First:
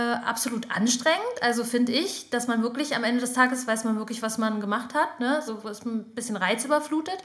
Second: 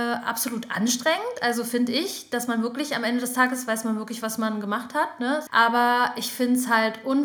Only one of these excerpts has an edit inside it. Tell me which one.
second; 1 cut; at 5.5 s

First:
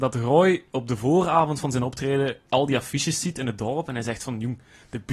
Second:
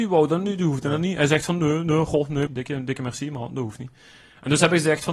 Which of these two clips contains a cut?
second; 1 cut; at 2.5 s

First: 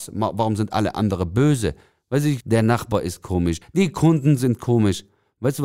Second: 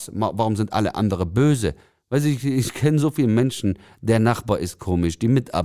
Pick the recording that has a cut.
first; 2 cuts; at 2.4 s, 3.6 s

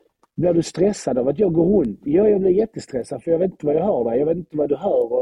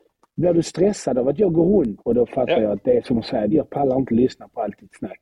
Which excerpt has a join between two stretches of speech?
second; 2 cuts; at 2.0 s, 3.5 s

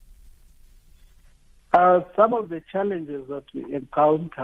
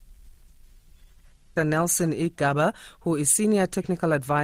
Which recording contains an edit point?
second; 1 cut; at 1.6 s

